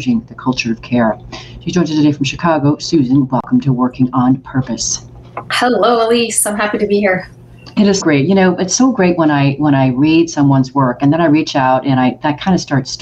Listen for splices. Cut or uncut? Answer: cut